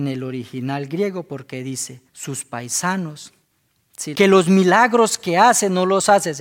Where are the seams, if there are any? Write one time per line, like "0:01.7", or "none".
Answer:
0:02.1
0:04.1